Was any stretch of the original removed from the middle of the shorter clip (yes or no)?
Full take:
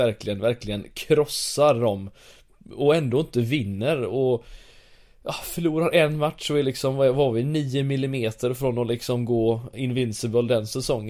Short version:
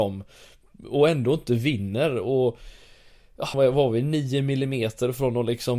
yes